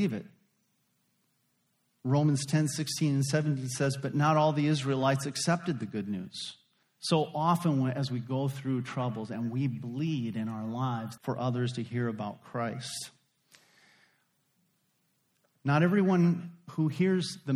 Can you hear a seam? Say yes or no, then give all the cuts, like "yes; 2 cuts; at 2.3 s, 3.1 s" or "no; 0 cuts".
yes; 2 cuts; at 6.8 s, 11.2 s